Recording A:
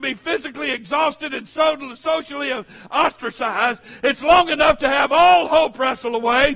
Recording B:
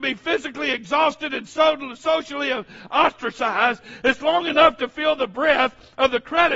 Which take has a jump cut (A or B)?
A